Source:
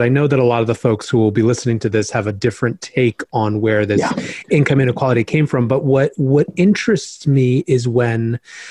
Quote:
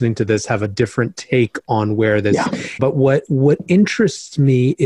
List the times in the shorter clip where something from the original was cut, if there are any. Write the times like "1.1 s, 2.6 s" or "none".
2.8 s